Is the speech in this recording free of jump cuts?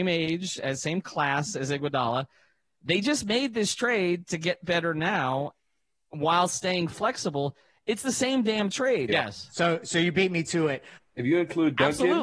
no; 2 cuts; at 9.1 s, 11.0 s

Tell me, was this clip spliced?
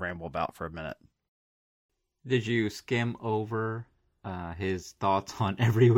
no; 0 cuts

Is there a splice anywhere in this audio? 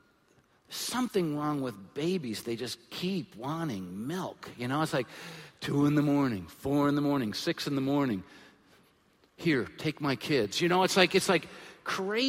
no; 0 cuts

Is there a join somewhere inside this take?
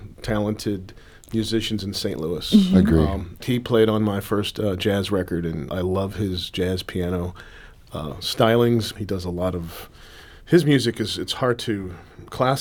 yes; 3 cuts; at 3.4 s, 5.7 s, 9.0 s

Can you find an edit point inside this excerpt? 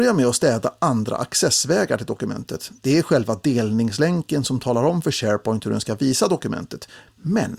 no; 0 cuts

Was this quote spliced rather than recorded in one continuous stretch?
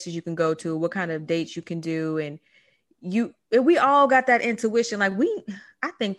no; 0 cuts

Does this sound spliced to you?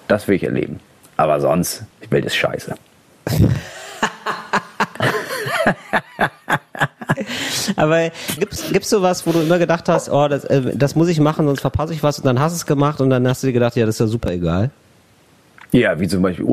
yes; 2 cuts; at 1.9 s, 8.4 s

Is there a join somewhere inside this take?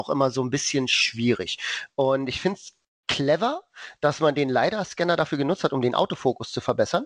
no; 0 cuts

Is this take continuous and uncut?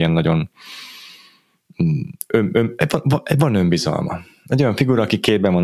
yes; 0 cuts

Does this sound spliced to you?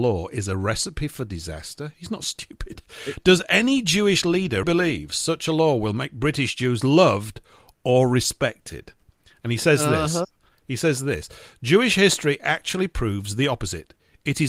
yes; 2 cuts; at 1.9 s, 4.6 s

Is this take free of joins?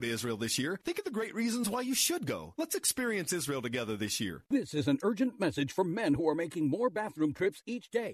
no; 2 cuts; at 2.6 s, 4.4 s

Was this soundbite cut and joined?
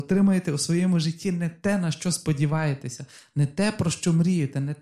no; 0 cuts

